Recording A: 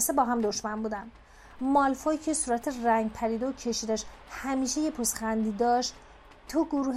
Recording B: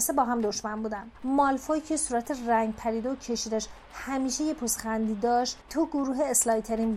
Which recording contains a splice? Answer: B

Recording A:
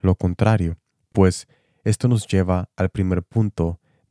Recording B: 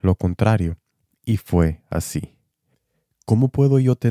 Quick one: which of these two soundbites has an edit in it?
B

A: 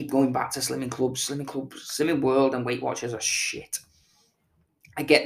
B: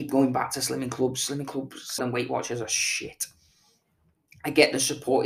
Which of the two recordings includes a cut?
B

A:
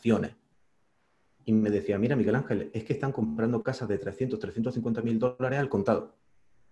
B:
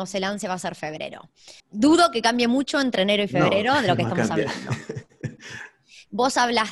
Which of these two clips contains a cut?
B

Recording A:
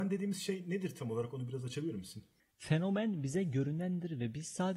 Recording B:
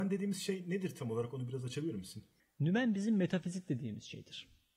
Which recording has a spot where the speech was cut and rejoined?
A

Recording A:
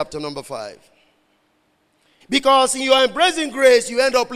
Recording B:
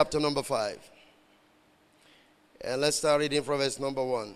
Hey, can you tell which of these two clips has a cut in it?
A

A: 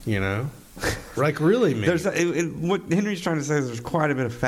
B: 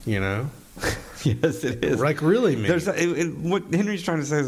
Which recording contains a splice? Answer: A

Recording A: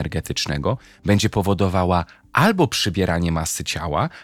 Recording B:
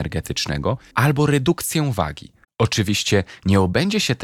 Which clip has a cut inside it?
B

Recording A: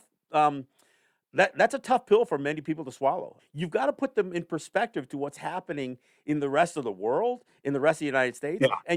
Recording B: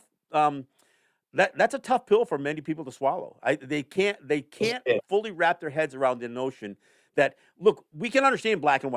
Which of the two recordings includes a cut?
A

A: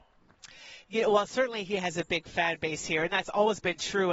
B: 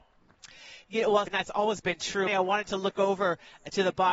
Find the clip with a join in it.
B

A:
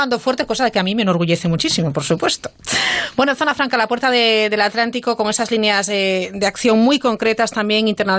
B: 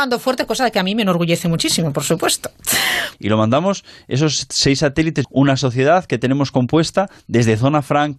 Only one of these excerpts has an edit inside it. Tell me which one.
B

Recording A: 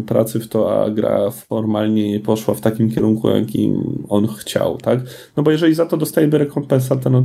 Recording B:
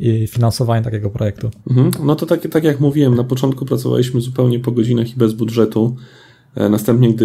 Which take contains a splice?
B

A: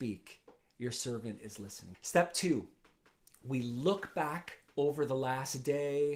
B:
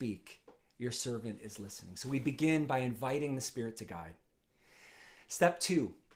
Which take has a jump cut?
A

